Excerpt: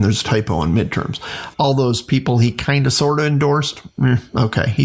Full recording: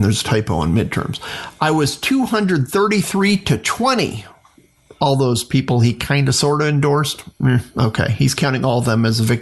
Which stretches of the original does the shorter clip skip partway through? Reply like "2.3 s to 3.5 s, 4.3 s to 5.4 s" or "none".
1.5 s to 4.9 s

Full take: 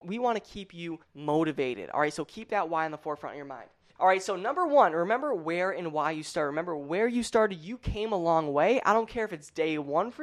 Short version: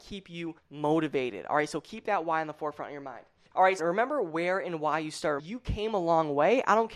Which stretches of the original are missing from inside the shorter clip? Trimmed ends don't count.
4.2 s to 4.9 s, 6.5 s to 7.6 s

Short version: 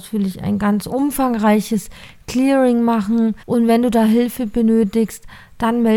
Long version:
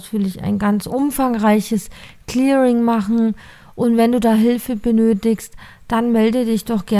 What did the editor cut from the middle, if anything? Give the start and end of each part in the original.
3.4 s to 3.7 s

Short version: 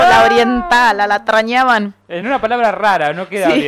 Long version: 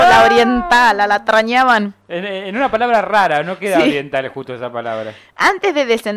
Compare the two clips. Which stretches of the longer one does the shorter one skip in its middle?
2.2 s to 2.5 s

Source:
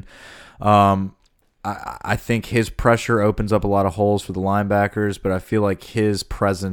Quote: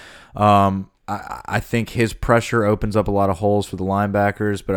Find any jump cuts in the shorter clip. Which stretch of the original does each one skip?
1.2 s to 1.5 s

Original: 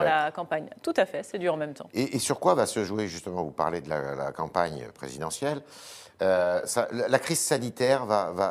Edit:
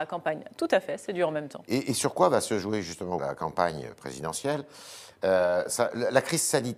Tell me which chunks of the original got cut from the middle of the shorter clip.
3.4 s to 4.2 s

